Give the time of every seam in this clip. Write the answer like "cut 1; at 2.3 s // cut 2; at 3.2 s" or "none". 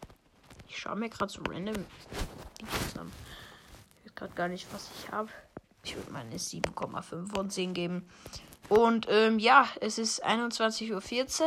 cut 1; at 3.9 s // cut 2; at 5.8 s // cut 3; at 8.6 s